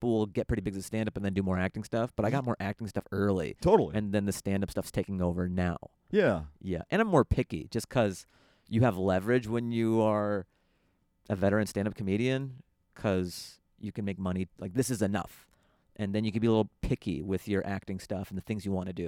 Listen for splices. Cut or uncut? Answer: uncut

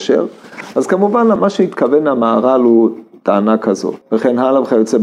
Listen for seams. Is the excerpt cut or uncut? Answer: cut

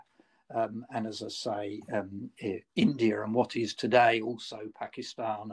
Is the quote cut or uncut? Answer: uncut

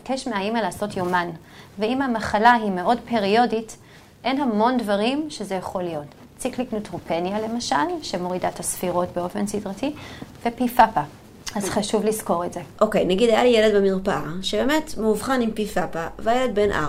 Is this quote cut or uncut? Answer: uncut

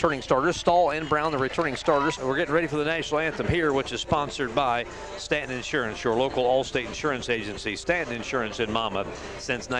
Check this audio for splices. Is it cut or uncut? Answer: cut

